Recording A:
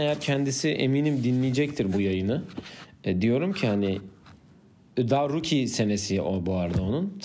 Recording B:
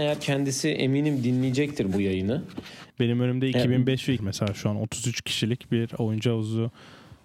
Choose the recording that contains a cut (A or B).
B